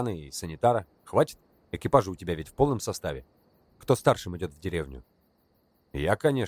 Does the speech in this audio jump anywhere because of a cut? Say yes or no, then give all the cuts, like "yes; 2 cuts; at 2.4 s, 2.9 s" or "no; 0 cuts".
yes; 1 cut; at 3.7 s